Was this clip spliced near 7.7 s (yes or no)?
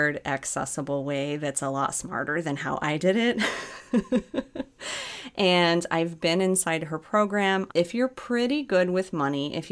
yes